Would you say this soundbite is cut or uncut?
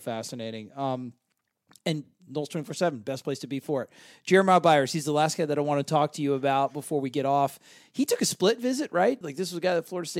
cut